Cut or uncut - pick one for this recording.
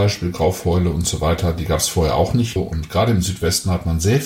cut